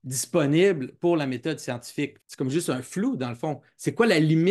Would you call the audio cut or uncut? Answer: cut